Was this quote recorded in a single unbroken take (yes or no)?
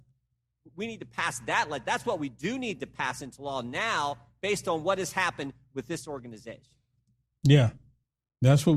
yes